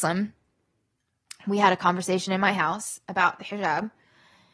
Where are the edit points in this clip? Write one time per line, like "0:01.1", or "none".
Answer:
none